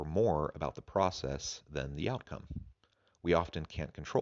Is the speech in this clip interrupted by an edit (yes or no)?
no